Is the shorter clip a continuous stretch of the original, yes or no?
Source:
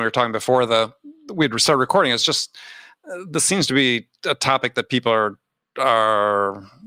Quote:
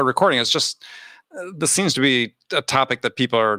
yes